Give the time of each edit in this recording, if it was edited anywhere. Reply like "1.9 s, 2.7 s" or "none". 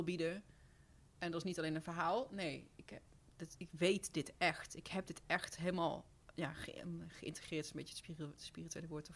none